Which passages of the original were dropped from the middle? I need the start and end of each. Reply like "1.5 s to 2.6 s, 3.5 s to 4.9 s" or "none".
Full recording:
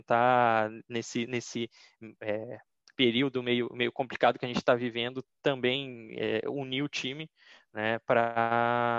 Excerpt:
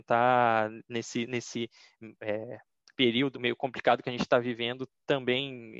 3.3 s to 3.7 s